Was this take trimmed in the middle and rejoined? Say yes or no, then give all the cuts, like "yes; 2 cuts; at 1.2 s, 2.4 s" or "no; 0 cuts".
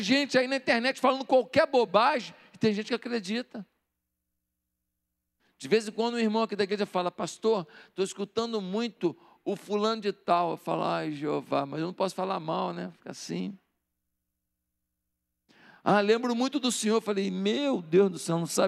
no; 0 cuts